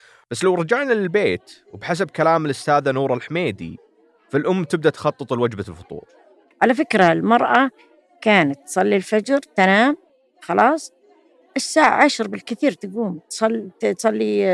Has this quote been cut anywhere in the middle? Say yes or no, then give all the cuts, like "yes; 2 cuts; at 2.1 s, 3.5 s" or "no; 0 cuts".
no; 0 cuts